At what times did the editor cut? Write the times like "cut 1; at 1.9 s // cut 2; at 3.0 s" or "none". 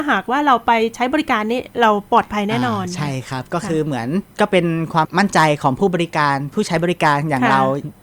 cut 1; at 5.0 s